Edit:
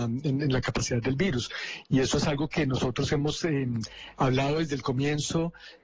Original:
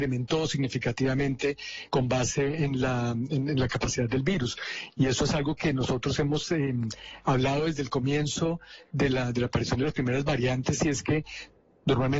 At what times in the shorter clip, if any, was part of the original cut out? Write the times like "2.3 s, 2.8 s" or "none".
none